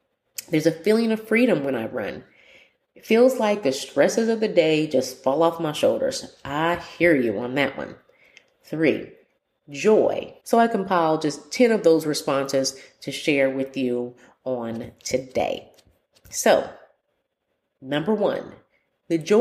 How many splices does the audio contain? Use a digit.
1